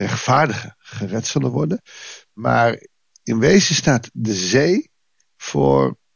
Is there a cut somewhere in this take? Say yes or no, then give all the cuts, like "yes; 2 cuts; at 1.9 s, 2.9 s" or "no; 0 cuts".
no; 0 cuts